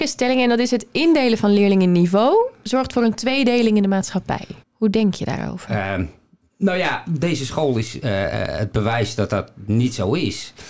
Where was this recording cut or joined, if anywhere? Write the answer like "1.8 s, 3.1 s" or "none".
4.6 s